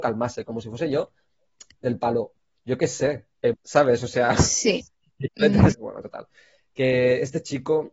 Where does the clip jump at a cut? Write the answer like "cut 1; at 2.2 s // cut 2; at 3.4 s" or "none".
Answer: cut 1; at 3.5 s // cut 2; at 5.7 s

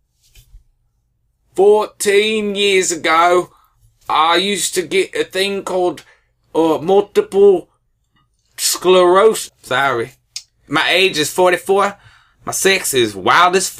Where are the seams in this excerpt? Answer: cut 1; at 9.5 s

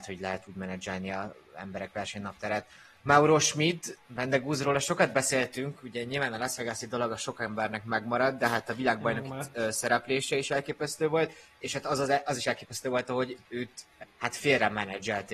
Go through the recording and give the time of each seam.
cut 1; at 4.0 s // cut 2; at 14.0 s

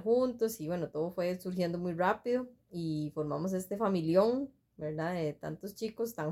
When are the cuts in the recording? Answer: none

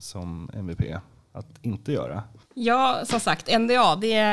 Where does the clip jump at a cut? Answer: none

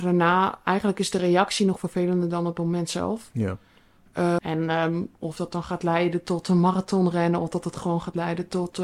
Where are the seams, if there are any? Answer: cut 1; at 4.4 s

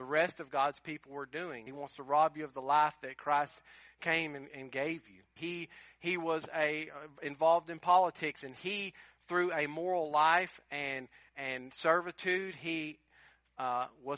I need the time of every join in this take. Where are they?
cut 1; at 1.7 s // cut 2; at 5.4 s

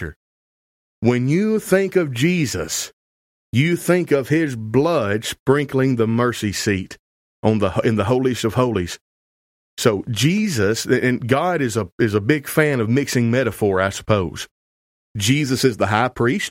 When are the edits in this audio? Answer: none

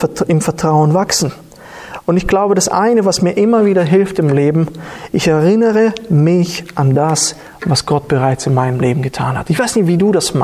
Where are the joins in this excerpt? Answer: none

